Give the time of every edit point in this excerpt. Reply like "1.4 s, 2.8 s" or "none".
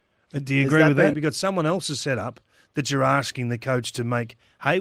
1.1 s

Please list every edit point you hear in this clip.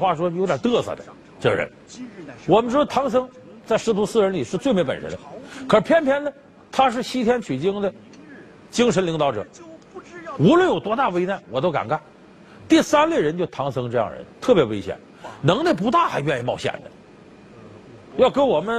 12.7 s

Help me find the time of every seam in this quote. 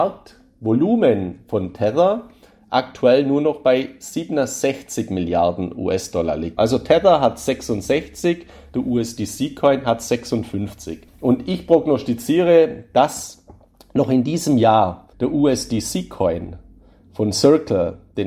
6.6 s, 11.1 s, 15.1 s

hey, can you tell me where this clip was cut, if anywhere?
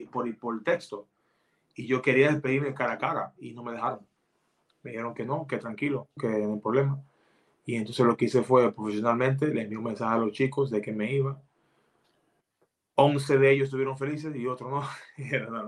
6.2 s

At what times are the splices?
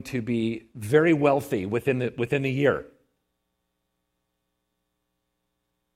none

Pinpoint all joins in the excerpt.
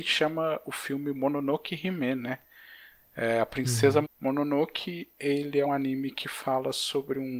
4.1 s, 5.7 s

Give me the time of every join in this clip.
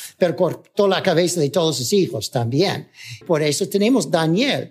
3.2 s

